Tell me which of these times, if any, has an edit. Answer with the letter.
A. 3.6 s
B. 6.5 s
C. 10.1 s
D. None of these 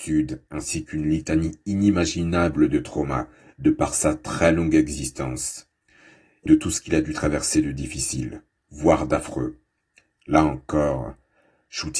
B